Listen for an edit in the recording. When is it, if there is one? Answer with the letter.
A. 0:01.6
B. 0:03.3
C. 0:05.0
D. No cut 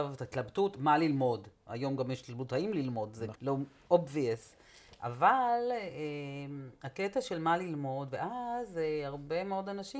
B